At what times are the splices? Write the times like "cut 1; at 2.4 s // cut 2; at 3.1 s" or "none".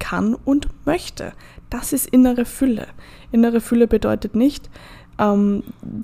none

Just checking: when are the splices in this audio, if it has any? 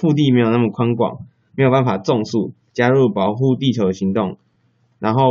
cut 1; at 2.7 s

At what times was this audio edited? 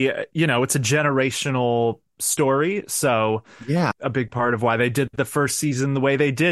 cut 1; at 3.9 s

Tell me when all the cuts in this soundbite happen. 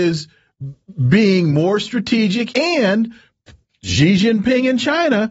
cut 1; at 2.5 s

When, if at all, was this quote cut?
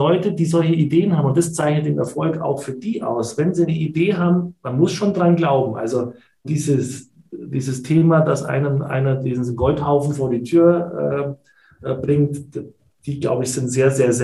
cut 1; at 6.4 s

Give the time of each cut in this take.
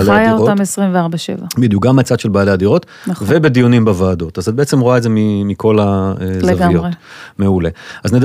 cut 1; at 3.0 s

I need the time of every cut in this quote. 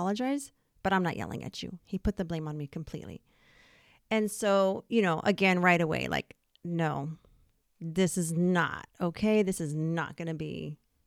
cut 1; at 1.8 s

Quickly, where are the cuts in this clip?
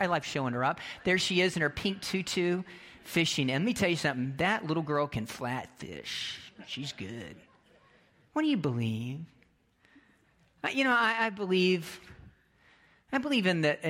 none

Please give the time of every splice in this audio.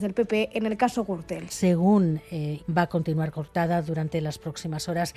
cut 1; at 1.5 s // cut 2; at 2.6 s

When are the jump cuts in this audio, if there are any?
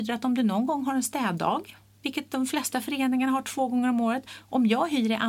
none

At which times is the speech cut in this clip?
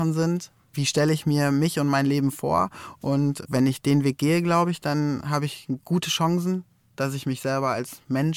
none

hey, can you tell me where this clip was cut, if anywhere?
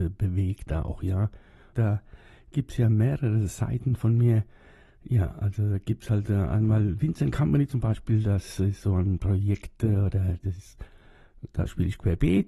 cut 1; at 1.7 s

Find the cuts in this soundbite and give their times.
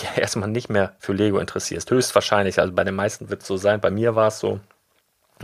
none

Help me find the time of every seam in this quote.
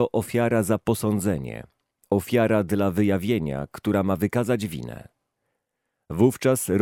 none

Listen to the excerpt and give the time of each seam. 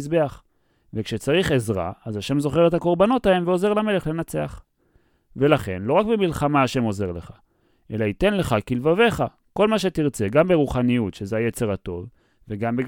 none

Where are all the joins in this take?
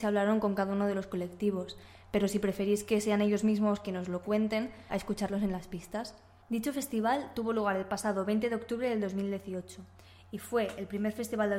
cut 1; at 4.9 s // cut 2; at 6.4 s

